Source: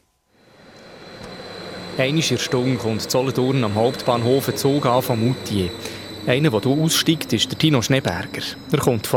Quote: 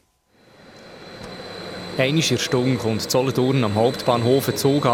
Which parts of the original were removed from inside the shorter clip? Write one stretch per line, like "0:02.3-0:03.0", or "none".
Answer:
none